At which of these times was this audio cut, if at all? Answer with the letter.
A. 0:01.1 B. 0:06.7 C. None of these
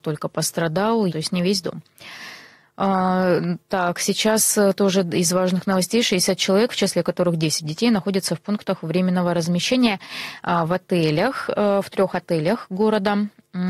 A